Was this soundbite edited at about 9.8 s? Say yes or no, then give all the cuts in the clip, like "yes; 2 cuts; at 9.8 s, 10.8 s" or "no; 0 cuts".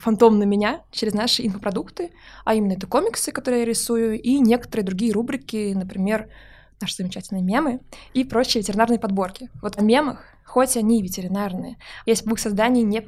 yes; 2 cuts; at 9.8 s, 12.0 s